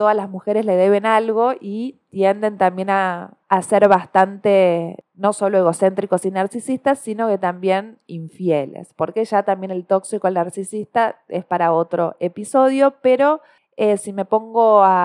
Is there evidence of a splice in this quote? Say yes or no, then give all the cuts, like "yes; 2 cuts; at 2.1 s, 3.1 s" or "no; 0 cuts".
no; 0 cuts